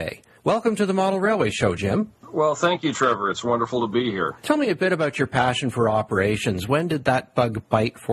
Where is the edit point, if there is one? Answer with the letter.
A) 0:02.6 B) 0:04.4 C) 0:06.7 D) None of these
B